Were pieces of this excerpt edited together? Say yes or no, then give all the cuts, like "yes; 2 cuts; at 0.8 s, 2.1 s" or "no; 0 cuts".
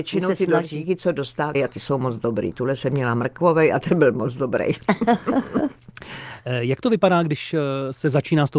yes; 1 cut; at 1.5 s